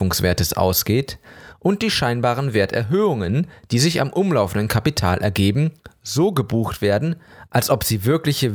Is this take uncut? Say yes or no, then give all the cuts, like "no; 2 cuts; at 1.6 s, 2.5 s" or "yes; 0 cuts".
yes; 0 cuts